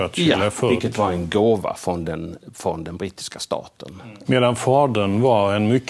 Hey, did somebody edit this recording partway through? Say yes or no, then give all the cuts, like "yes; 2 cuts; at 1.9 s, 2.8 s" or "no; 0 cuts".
yes; 1 cut; at 4.2 s